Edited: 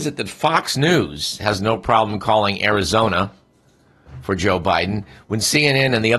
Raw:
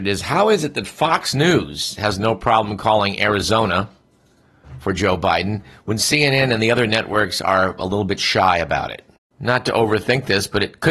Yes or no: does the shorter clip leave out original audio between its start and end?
no